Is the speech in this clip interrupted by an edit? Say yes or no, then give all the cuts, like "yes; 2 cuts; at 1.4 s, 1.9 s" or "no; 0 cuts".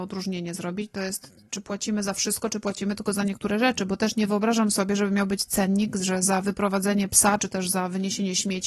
no; 0 cuts